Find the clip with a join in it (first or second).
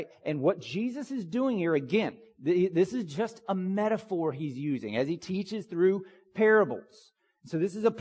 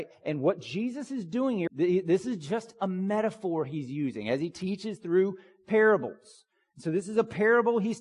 second